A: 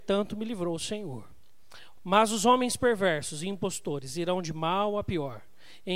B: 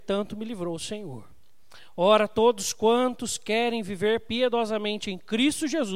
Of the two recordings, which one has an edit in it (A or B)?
A